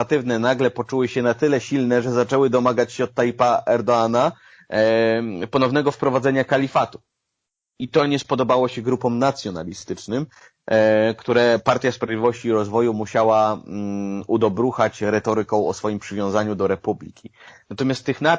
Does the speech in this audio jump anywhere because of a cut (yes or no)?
no